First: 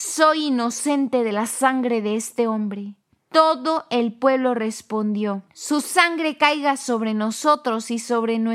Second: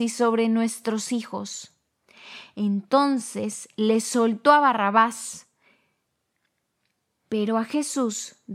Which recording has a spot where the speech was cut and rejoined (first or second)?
first